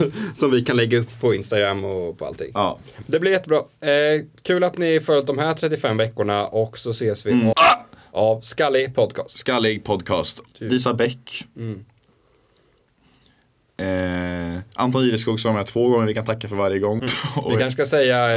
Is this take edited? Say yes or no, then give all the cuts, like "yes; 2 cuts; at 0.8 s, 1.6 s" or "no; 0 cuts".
yes; 3 cuts; at 7.5 s, 10.5 s, 17.0 s